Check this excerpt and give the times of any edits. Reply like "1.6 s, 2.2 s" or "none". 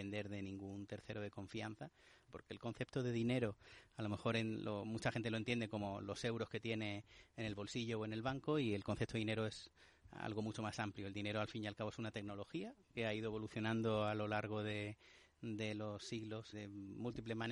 2.3 s, 16.5 s